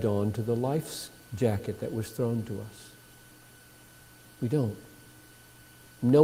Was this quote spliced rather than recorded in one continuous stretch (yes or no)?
no